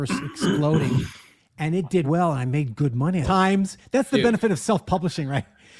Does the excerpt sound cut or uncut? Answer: cut